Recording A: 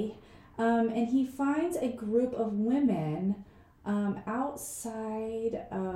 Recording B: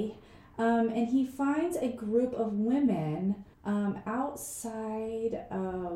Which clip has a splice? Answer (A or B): B